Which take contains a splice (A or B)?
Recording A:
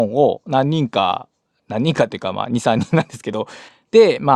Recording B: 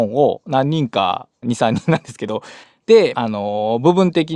B